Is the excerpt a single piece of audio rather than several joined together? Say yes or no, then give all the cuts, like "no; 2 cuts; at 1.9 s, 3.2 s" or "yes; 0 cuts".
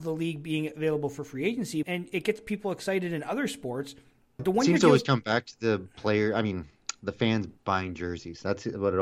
no; 2 cuts; at 1.8 s, 4.4 s